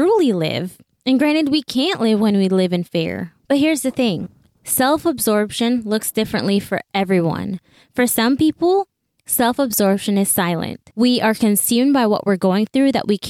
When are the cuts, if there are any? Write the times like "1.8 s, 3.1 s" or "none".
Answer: 10.9 s

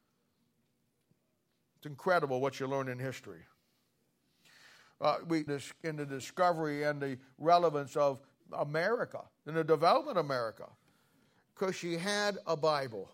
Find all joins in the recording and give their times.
5.5 s, 11.5 s

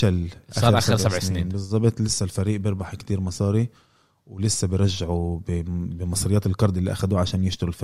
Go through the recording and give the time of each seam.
none

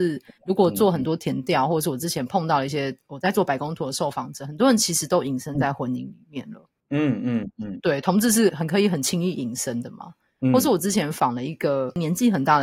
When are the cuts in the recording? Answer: 8.5 s

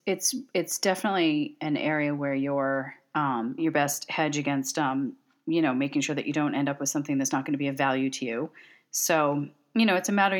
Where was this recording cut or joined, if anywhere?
3.6 s

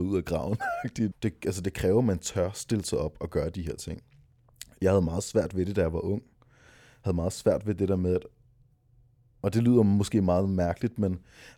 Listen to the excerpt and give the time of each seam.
1.1 s

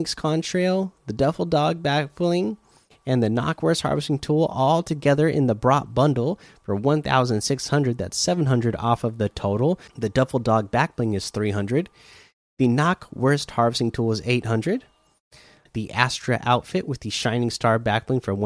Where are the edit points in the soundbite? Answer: 9.9 s, 15.7 s

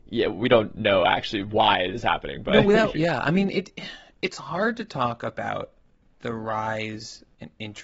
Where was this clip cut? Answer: 2.9 s

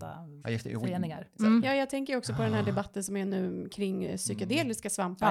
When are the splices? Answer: 1.4 s

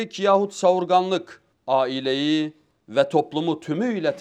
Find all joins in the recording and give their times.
1.5 s

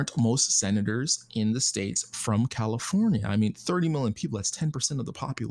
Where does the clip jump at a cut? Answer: none

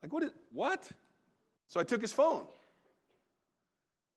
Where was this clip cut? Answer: 1.6 s

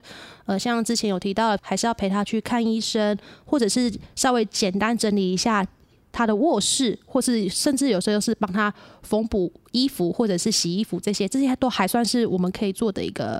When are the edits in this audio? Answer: 1.6 s

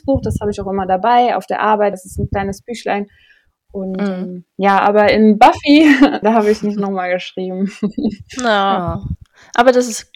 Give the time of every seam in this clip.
1.9 s, 6.2 s

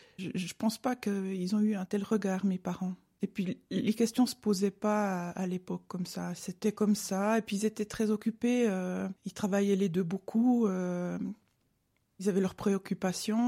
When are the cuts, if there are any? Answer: 9.2 s

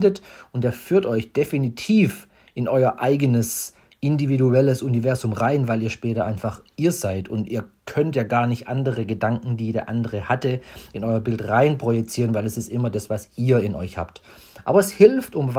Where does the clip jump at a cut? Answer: none

